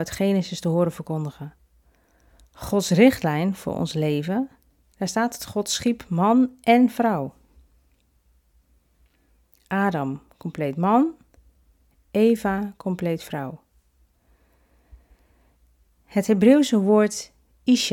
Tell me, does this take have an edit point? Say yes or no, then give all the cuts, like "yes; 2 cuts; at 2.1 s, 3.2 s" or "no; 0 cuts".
yes; 1 cut; at 4.8 s